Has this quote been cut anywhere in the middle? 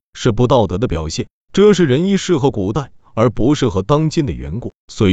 yes; 1 cut; at 1.4 s

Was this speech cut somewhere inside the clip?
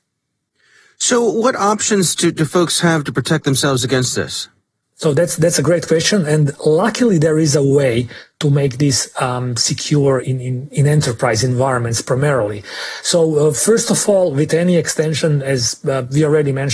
yes; 1 cut; at 10.2 s

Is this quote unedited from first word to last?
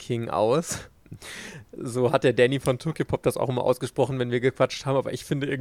yes; 0 cuts

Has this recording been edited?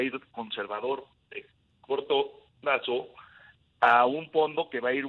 no; 0 cuts

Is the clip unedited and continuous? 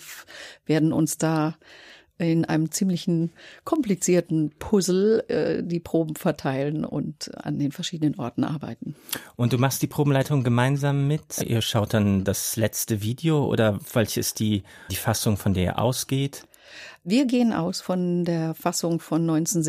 no; 2 cuts; at 11.4 s, 14.9 s

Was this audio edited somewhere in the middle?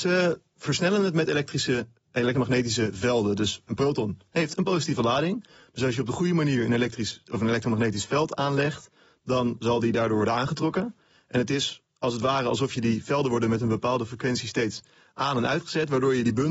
no; 0 cuts

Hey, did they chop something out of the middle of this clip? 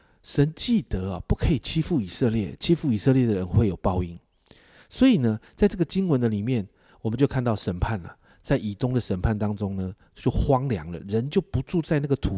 no; 0 cuts

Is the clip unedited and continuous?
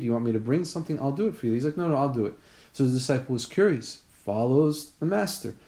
yes; 0 cuts

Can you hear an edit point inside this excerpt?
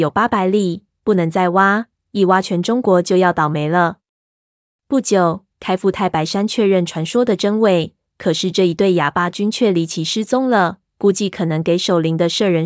yes; 1 cut; at 5.5 s

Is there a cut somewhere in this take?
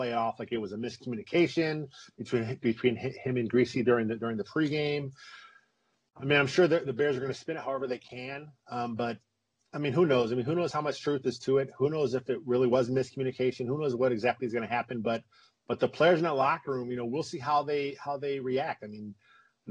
no; 0 cuts

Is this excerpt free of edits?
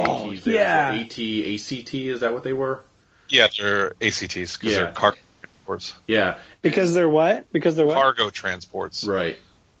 yes; 0 cuts

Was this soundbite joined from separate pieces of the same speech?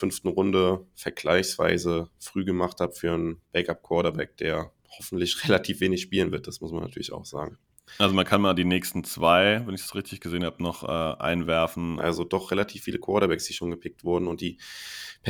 yes; 1 cut; at 12.0 s

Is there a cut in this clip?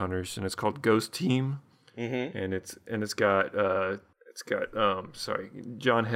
no; 0 cuts

